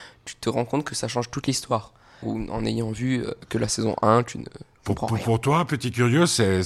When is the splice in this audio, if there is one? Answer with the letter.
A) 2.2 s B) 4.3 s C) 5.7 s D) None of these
A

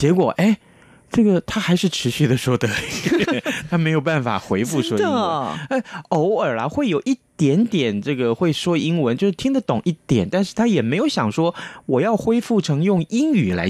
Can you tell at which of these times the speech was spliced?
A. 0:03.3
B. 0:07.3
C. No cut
A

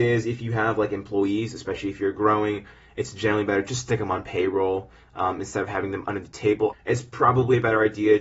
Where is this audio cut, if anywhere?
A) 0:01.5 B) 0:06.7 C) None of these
B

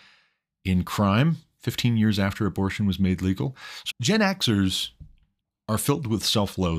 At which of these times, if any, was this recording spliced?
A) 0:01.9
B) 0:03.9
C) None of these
B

